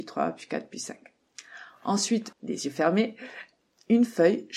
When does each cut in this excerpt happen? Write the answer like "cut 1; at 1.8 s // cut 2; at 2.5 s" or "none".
cut 1; at 2.3 s